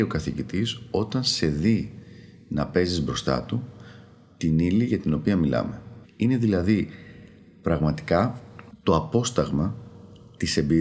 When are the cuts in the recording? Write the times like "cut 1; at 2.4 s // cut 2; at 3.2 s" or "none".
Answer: cut 1; at 6.0 s